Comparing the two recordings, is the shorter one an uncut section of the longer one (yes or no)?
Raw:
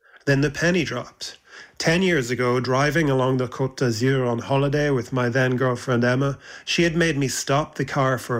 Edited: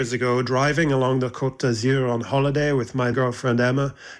no